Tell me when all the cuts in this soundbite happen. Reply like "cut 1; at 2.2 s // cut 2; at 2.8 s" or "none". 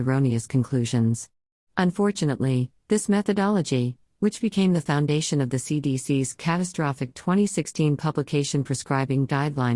cut 1; at 1.6 s